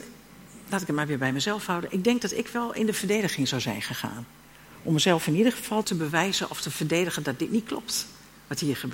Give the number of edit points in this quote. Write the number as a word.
one